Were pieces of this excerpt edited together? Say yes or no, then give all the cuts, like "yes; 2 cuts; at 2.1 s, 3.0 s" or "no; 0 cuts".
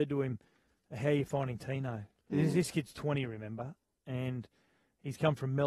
no; 0 cuts